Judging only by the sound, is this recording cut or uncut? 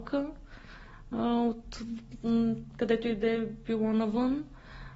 uncut